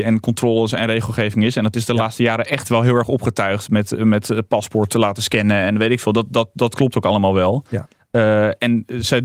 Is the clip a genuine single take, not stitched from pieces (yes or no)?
yes